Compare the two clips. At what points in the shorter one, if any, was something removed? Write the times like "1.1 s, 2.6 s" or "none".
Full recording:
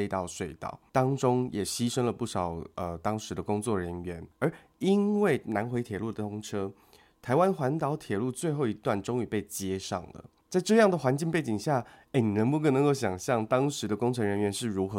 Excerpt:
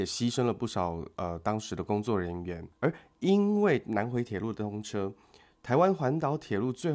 none